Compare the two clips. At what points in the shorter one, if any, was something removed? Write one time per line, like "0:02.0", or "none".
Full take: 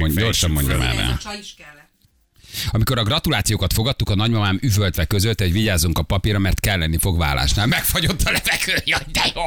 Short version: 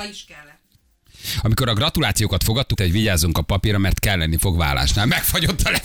0:02.8